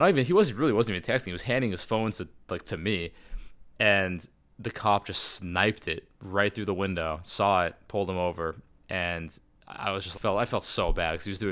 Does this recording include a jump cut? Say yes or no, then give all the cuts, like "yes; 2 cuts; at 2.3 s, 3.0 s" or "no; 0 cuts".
yes; 2 cuts; at 6.1 s, 10.1 s